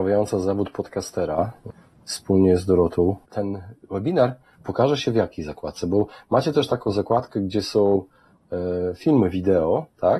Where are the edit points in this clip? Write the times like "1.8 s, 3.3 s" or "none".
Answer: 3.3 s